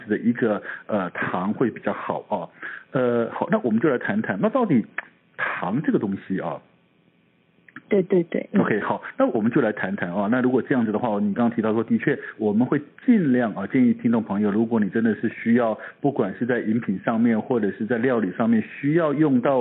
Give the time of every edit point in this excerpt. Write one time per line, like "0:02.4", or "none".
0:07.8